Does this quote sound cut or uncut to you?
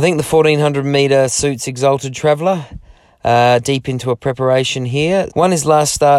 cut